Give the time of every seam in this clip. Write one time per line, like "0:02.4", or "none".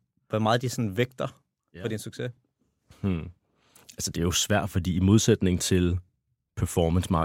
none